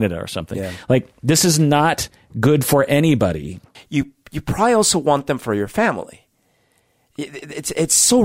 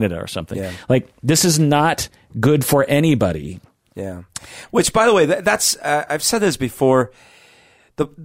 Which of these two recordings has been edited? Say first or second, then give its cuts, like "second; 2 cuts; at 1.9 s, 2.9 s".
first; 1 cut; at 3.7 s